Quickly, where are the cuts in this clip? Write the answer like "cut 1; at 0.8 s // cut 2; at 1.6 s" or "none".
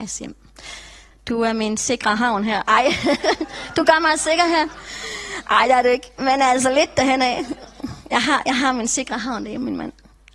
cut 1; at 1.1 s